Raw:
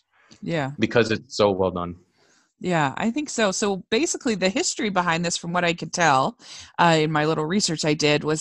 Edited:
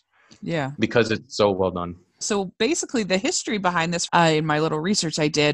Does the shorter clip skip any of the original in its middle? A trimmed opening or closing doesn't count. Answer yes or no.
yes